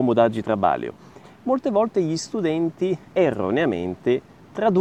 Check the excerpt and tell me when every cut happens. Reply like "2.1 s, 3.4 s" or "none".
1.2 s, 3.1 s

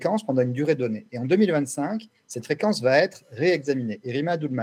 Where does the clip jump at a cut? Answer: none

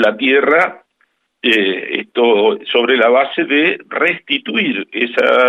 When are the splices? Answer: none

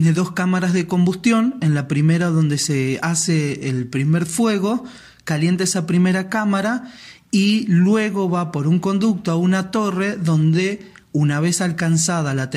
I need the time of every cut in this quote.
none

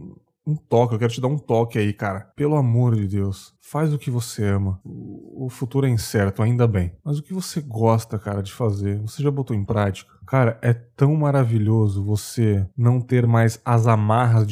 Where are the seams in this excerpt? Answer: 4.8 s

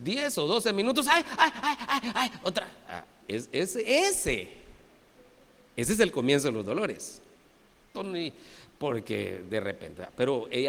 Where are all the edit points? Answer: 7.9 s

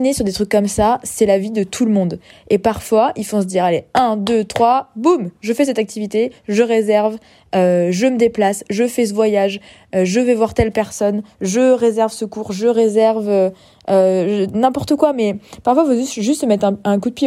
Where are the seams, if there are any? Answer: none

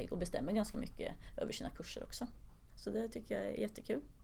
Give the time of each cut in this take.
2.7 s

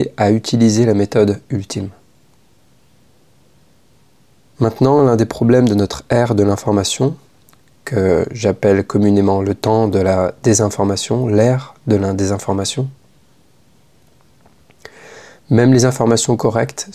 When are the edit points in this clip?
none

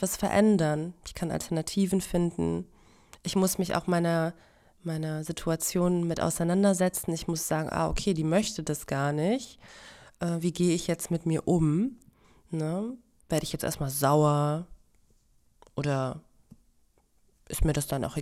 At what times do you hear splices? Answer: none

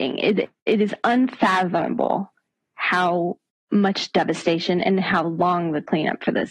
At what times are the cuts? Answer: none

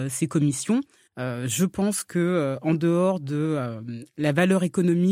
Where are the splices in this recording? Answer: 1.1 s

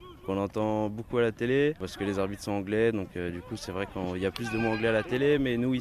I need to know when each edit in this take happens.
none

